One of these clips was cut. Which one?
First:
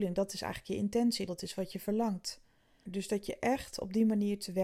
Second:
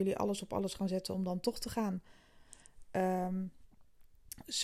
first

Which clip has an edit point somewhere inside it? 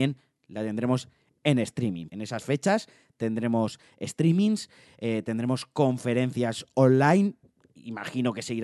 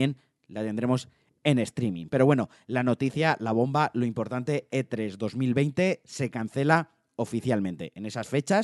first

